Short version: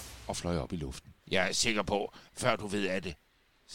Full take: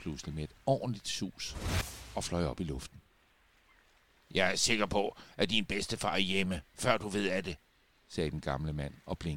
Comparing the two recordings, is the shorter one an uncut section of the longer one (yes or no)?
no